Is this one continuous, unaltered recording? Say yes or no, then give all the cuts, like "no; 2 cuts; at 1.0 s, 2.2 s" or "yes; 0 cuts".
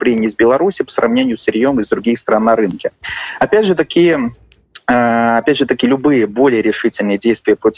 yes; 0 cuts